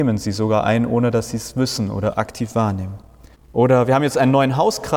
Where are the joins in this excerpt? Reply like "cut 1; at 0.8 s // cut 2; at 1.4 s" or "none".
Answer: cut 1; at 3.3 s

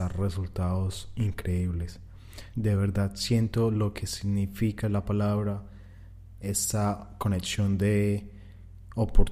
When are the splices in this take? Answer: cut 1; at 2.5 s

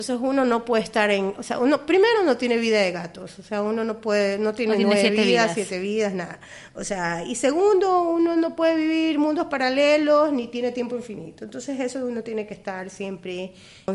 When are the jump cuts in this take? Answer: none

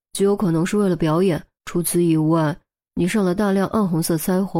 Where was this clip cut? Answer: cut 1; at 1.6 s

